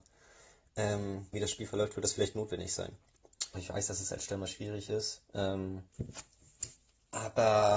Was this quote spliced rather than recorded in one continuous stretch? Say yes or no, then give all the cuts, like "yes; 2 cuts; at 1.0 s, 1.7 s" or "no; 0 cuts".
yes; 2 cuts; at 1.3 s, 3.5 s